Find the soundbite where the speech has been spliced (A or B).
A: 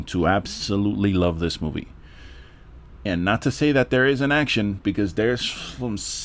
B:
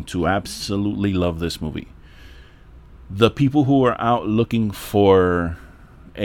A